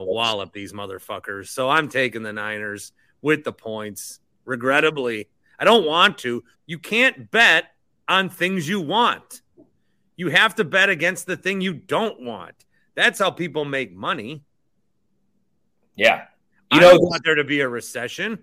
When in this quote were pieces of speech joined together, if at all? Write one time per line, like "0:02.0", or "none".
0:06.5